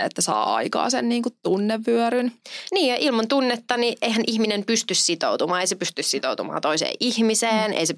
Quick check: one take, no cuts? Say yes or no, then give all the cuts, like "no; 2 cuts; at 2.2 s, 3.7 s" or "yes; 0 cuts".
yes; 0 cuts